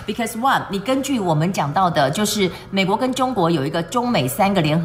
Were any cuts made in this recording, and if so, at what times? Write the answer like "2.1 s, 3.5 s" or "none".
none

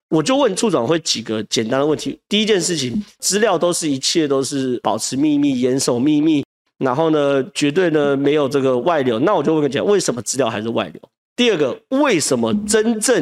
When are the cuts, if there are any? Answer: 11.3 s

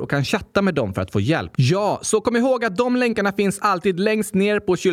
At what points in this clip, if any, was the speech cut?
1.5 s

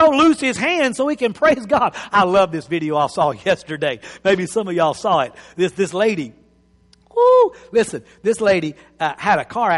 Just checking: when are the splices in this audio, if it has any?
none

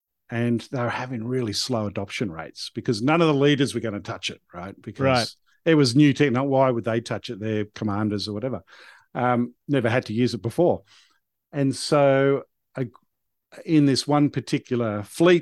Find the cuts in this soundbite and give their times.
none

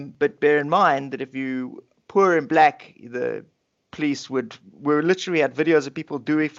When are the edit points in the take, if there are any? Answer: none

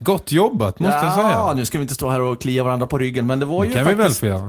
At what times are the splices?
none

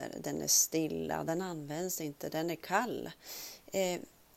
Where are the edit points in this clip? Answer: none

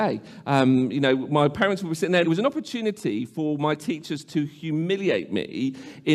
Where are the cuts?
2.2 s

